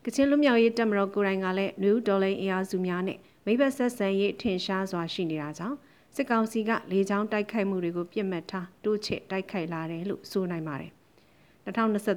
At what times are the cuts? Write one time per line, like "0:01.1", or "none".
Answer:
none

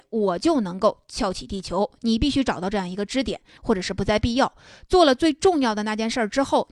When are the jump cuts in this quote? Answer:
0:03.6

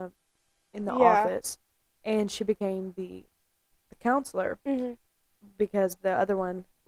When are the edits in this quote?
none

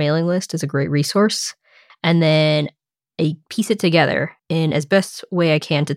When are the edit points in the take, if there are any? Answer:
0:01.9
0:04.4

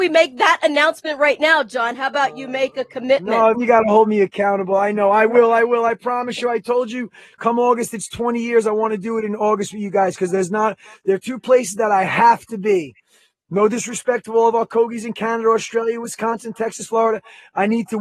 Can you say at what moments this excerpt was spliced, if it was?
0:03.5

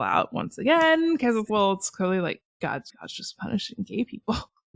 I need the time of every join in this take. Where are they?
0:01.5
0:02.9

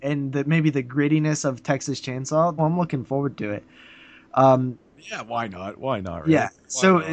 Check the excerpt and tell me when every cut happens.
0:02.6

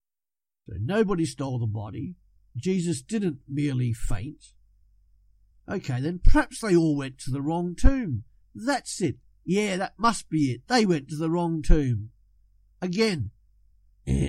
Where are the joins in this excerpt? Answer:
none

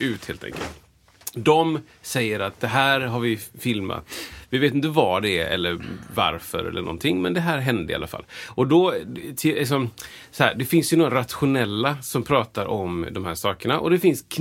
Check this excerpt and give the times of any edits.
none

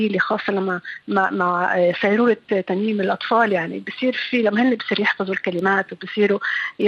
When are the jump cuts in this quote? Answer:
none

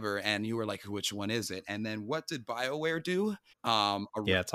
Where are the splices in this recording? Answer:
0:03.5

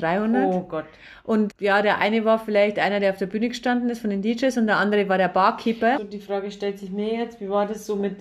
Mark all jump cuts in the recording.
0:01.5
0:06.0

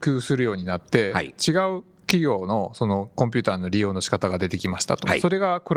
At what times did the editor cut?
none

